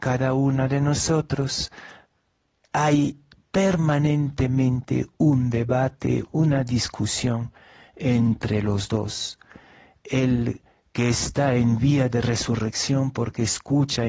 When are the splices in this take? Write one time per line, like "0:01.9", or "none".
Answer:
0:06.3